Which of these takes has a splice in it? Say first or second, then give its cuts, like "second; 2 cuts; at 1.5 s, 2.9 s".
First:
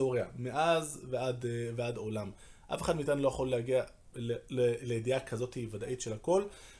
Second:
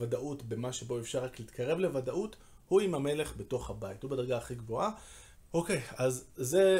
second; 1 cut; at 5.4 s